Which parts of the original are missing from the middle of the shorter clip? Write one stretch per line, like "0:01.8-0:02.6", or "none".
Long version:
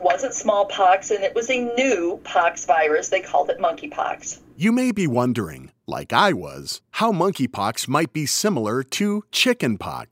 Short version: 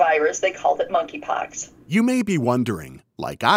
none